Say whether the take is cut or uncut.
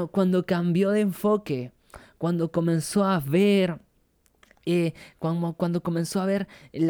uncut